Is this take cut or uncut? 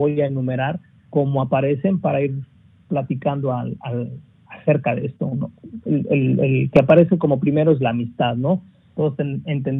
uncut